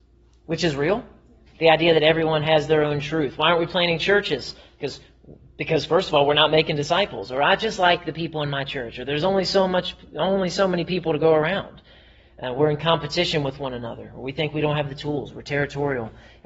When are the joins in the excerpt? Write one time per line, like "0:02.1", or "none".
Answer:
0:01.5